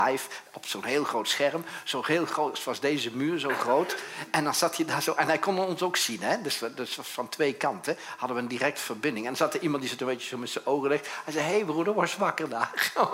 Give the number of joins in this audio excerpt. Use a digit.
0